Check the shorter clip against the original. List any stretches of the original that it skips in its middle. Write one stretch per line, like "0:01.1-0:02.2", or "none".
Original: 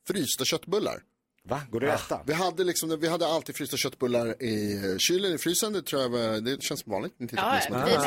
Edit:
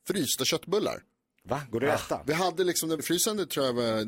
0:03.0-0:05.3